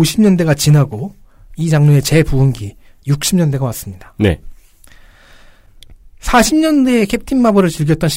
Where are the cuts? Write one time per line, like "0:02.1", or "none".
none